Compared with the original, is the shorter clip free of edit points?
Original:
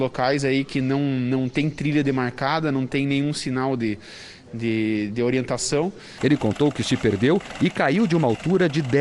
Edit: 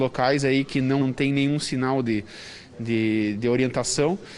no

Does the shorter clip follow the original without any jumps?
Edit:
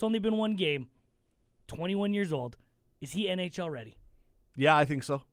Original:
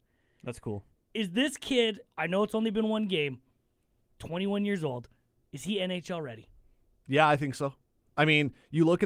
yes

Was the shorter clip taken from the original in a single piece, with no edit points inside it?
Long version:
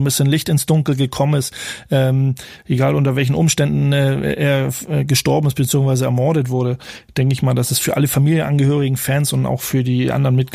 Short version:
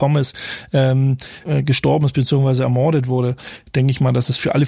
no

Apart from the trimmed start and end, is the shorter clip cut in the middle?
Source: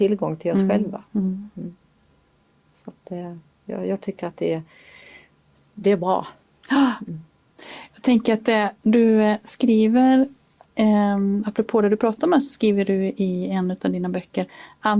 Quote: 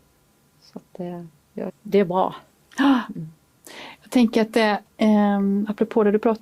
yes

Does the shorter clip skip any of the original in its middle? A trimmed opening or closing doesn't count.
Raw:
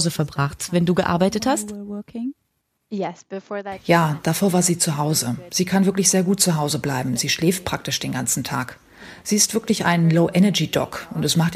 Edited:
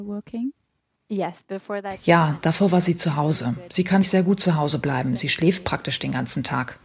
yes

